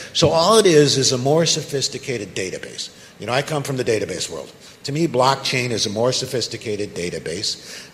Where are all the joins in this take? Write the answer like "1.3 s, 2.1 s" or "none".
none